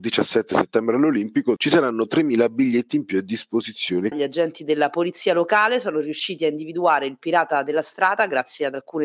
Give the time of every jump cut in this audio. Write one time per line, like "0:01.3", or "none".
0:01.6
0:04.1